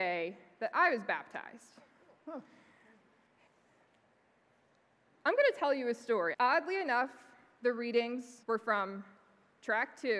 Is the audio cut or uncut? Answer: cut